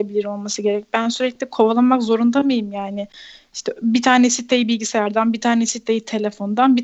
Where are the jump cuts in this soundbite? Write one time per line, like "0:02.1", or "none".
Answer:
none